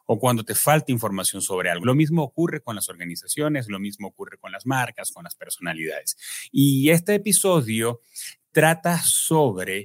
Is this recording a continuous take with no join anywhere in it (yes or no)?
no